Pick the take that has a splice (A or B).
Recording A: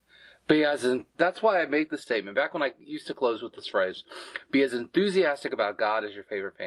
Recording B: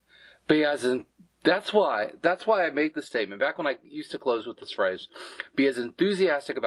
A